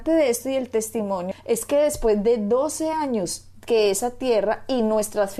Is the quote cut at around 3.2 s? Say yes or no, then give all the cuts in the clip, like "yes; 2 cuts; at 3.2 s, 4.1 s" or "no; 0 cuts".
no; 1 cut; at 1.3 s